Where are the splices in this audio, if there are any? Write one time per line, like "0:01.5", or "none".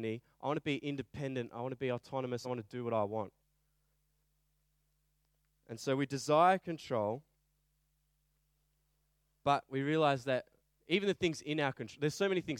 none